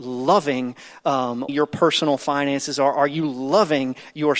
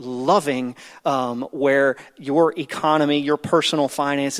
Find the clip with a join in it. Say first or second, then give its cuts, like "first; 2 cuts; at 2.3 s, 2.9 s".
first; 1 cut; at 1.5 s